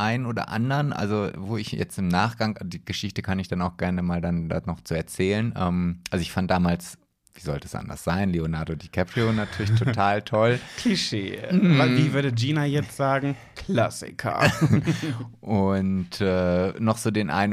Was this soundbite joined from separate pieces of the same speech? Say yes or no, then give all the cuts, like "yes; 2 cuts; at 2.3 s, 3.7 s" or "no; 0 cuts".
no; 0 cuts